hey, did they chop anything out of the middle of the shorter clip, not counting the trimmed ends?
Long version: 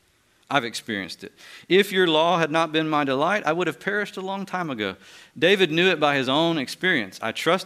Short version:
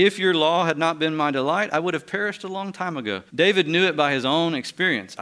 yes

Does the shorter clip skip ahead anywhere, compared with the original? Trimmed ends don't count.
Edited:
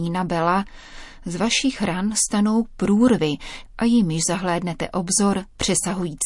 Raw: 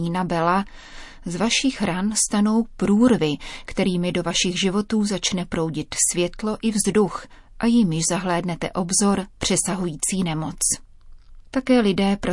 yes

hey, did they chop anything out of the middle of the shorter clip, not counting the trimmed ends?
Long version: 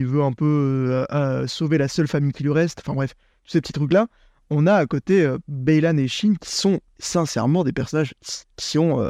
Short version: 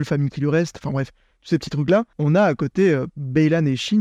yes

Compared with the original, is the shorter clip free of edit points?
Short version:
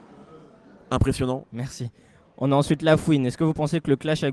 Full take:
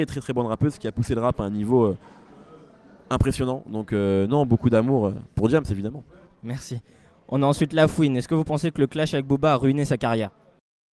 no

